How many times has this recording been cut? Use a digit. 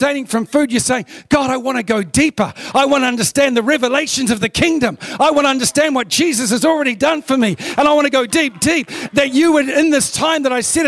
1